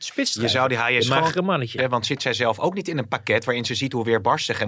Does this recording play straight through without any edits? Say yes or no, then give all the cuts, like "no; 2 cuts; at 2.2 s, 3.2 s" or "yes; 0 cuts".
no; 1 cut; at 1.8 s